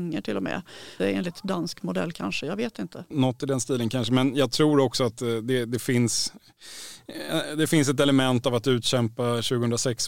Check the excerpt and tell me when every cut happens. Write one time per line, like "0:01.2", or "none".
0:01.0